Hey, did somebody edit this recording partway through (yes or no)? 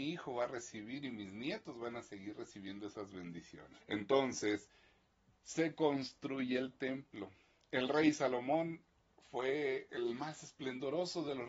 yes